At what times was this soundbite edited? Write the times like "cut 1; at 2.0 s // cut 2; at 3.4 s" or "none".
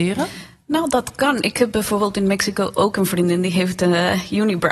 none